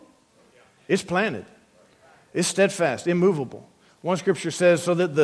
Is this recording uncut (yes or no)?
yes